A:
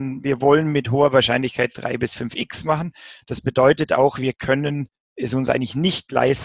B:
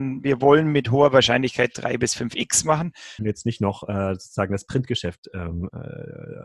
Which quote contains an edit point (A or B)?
B